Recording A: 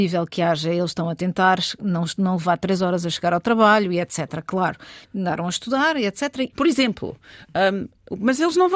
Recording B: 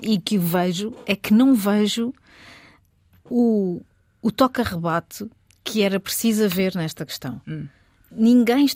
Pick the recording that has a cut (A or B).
A